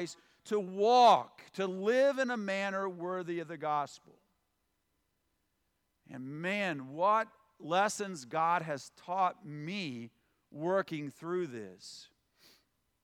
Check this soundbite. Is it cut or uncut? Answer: uncut